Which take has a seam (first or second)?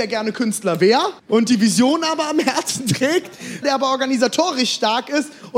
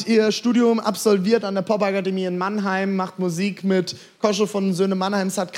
first